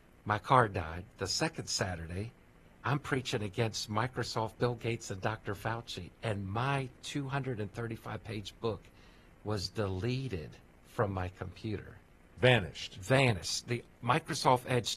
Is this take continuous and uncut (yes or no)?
yes